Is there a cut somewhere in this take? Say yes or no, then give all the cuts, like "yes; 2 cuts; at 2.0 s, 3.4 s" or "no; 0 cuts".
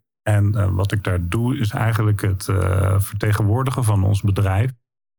no; 0 cuts